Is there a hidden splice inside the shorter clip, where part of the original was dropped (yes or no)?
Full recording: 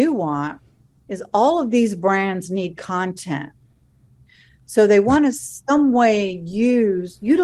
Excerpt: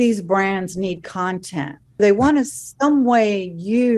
yes